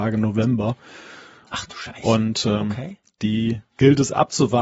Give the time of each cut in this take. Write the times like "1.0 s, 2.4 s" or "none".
3.7 s